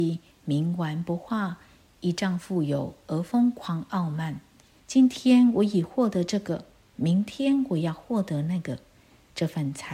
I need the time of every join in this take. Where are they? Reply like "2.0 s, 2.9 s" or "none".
4.8 s